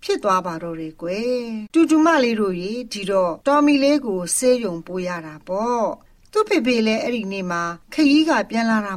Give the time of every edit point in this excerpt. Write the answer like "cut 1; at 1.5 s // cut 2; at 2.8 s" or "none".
cut 1; at 1.7 s